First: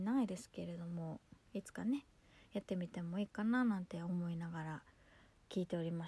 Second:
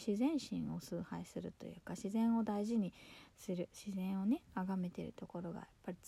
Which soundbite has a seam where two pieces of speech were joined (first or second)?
first